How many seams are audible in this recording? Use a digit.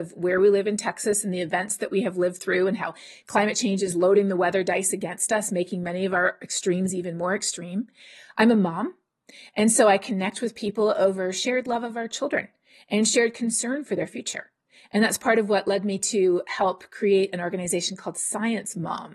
0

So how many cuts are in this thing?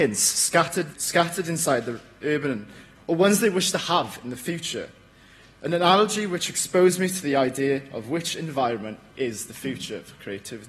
2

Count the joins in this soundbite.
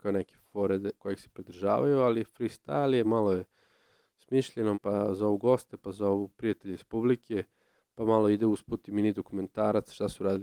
2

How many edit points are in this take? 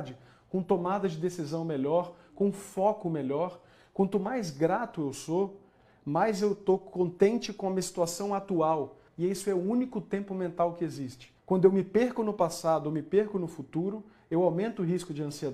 2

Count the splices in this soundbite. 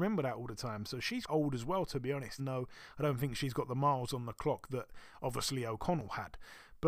2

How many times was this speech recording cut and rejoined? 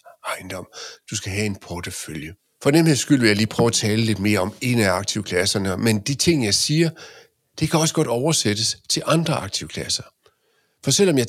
0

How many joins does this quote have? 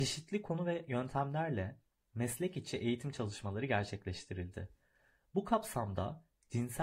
0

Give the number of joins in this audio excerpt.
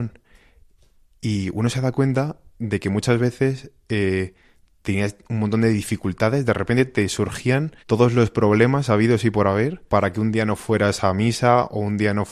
2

